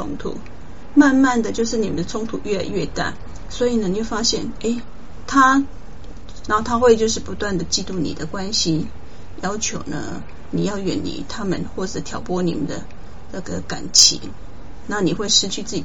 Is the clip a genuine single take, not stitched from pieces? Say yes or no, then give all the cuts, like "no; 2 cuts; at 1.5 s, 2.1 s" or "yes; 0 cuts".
no; 1 cut; at 6.5 s